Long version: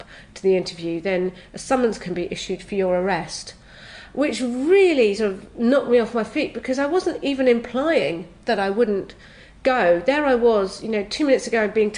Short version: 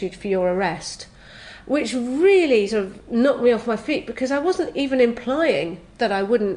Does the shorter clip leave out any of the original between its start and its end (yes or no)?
no